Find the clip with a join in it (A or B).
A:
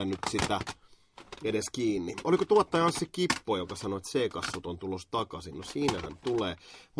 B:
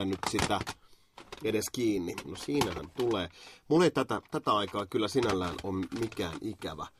B